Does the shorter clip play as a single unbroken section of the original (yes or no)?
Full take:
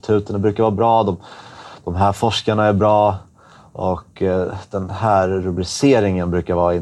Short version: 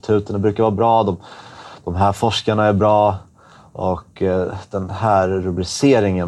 yes